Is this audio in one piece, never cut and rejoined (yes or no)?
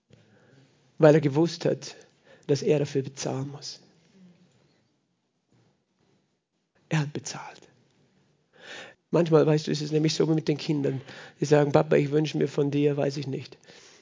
no